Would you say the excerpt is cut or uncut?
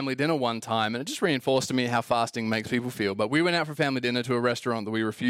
uncut